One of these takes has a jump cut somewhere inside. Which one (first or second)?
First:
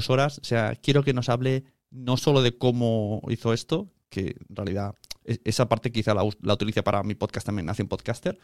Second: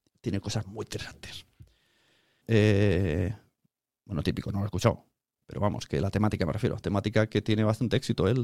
second